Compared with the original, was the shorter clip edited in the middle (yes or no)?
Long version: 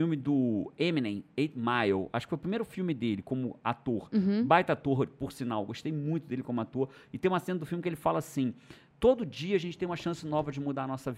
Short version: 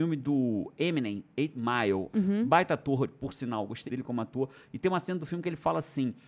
yes